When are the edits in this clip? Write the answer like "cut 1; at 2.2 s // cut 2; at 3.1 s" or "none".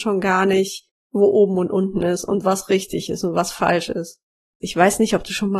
cut 1; at 4.6 s